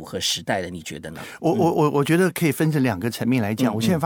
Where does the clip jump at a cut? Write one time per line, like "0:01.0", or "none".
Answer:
none